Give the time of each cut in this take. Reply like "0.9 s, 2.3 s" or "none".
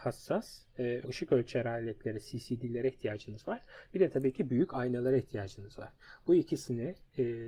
1.0 s